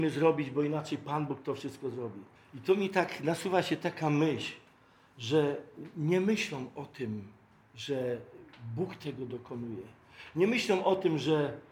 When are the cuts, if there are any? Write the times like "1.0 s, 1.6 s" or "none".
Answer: 2.4 s